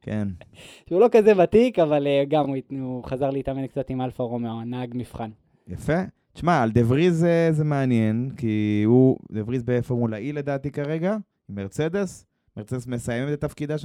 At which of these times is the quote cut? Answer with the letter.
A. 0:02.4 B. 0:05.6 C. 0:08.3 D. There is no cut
D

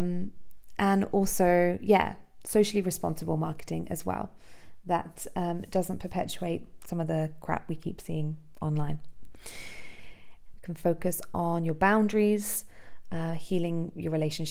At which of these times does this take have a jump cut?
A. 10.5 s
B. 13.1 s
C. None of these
A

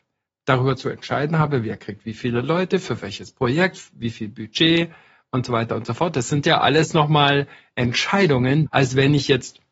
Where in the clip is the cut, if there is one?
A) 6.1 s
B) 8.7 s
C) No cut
B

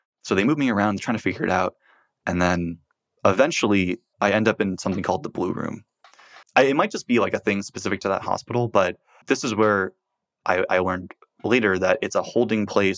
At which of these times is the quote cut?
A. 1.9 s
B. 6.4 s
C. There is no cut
B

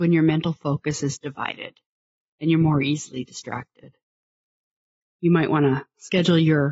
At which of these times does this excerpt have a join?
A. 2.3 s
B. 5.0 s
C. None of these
B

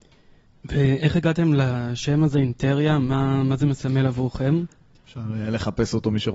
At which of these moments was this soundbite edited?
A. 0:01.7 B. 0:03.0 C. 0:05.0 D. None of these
C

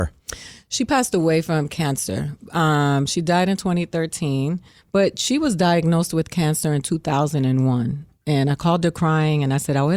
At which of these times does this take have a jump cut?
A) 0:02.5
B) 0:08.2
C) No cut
C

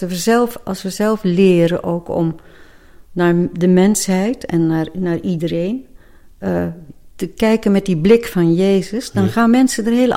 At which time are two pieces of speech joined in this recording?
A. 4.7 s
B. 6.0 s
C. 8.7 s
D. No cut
D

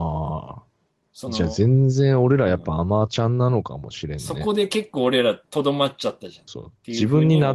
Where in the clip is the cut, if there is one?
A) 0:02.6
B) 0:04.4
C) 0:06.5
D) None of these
C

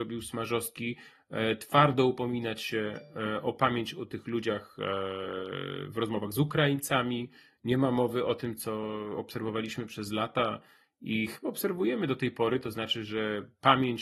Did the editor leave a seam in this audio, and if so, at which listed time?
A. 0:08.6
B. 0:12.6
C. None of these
C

